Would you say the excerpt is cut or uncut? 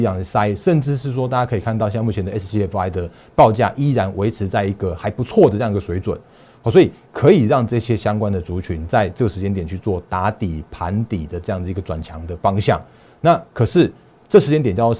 uncut